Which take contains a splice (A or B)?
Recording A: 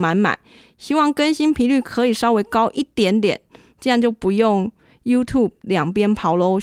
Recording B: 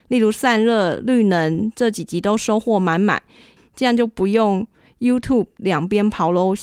B